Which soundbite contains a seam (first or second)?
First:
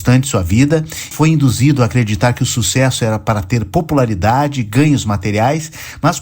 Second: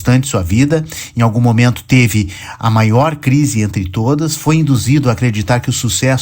first